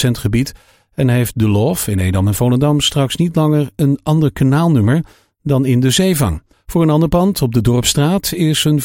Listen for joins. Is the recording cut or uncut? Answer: cut